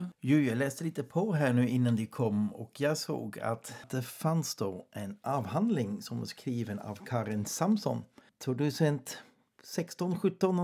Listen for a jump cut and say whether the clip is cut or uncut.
uncut